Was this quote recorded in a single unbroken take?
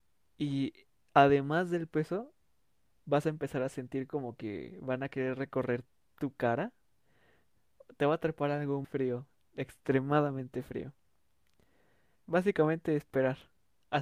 no; 2 cuts; at 8.8 s, 12.2 s

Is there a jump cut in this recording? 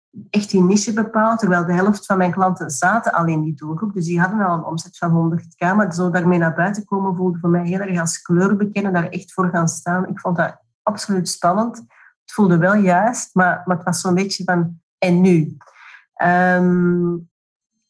no; 0 cuts

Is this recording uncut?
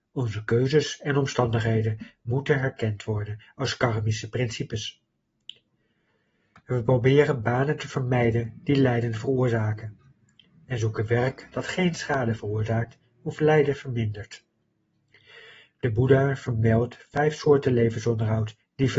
yes; 0 cuts

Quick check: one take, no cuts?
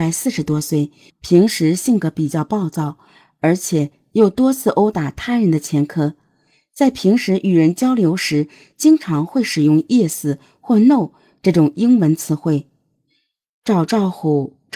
no; 1 cut; at 1.1 s

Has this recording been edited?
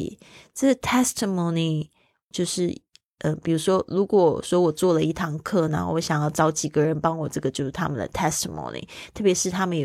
yes; 2 cuts; at 2.3 s, 7.3 s

